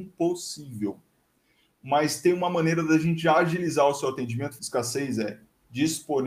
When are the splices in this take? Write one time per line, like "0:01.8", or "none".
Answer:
0:04.6